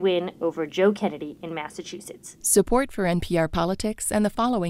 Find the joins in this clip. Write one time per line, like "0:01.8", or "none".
0:02.4